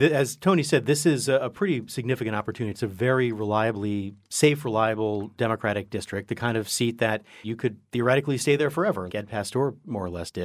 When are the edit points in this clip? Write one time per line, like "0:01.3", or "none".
0:07.4
0:09.1